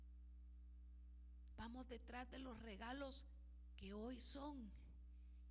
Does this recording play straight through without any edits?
no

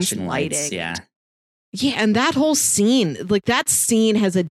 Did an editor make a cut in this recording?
no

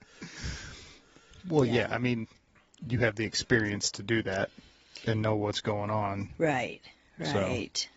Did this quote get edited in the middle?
no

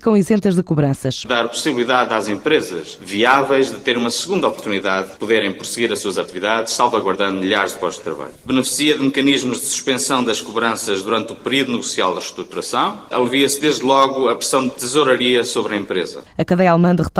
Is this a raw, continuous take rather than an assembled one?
no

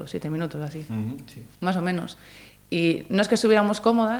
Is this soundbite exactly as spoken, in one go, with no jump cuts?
no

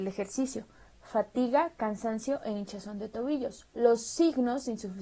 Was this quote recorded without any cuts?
no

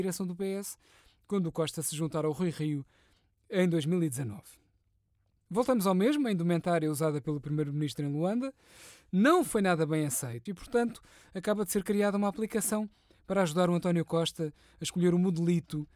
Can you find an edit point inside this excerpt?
yes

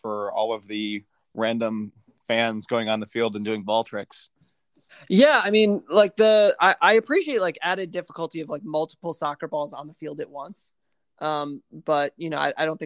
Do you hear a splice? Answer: no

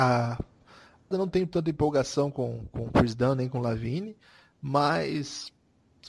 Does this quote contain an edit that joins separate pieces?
yes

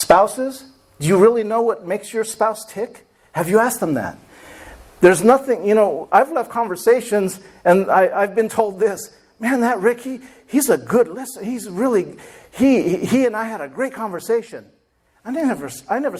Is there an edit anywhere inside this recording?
no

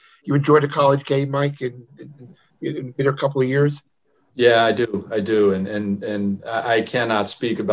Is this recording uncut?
yes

